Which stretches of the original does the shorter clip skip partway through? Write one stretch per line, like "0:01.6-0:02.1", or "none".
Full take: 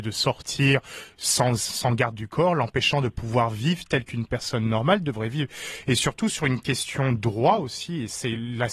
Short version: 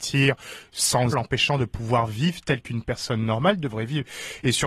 0:01.6-0:02.5